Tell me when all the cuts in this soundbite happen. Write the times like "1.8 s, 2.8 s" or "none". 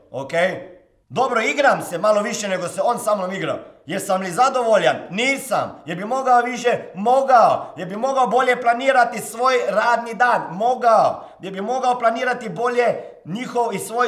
1.0 s